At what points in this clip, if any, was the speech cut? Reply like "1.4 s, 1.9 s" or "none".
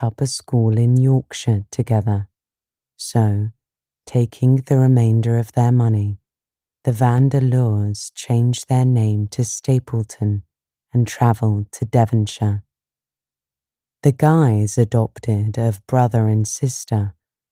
2.8 s